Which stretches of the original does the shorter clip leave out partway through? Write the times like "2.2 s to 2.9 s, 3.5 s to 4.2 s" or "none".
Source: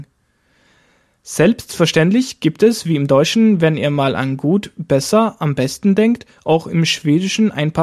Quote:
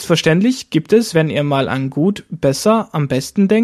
2.8 s to 3.6 s